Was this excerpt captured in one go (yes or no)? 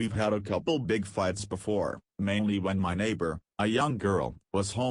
yes